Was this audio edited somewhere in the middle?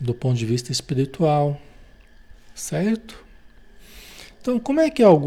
no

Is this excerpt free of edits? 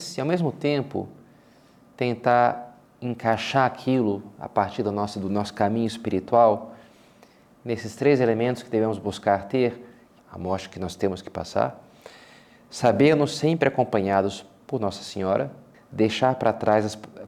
no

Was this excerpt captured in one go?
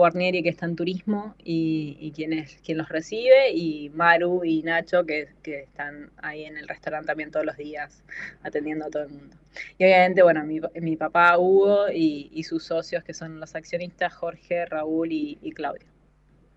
yes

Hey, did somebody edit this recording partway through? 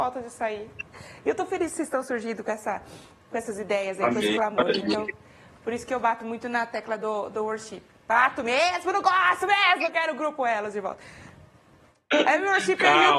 no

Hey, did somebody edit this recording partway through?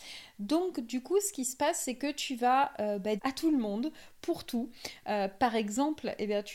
yes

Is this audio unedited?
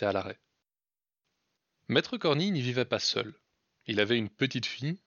yes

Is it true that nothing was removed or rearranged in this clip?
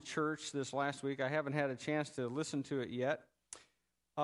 yes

